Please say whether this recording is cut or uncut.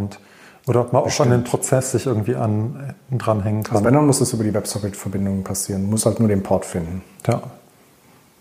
uncut